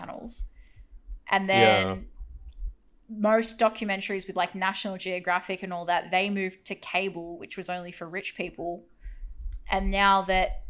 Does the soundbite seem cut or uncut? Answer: uncut